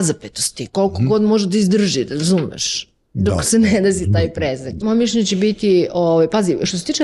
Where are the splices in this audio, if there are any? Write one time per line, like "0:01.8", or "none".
0:04.8